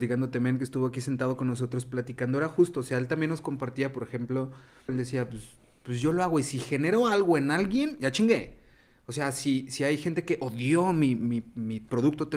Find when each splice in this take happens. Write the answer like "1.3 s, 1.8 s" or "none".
4.9 s